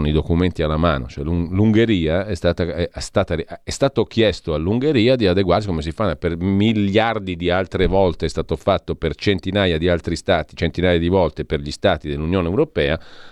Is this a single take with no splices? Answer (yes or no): yes